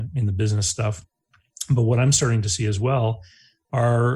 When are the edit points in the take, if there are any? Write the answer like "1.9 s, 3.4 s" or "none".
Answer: none

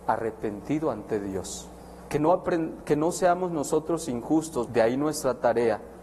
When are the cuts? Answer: 2.1 s, 4.6 s

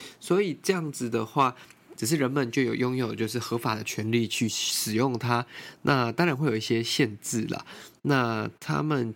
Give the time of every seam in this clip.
2.0 s

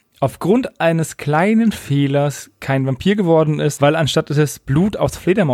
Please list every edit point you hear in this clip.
3.8 s

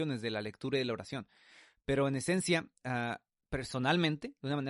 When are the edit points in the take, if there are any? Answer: 3.5 s

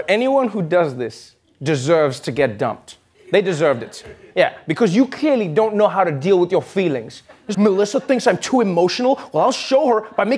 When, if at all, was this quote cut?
7.5 s

